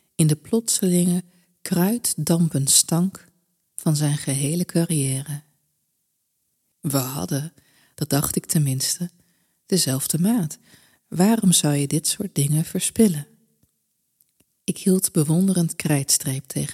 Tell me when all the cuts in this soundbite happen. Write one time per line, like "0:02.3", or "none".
0:06.7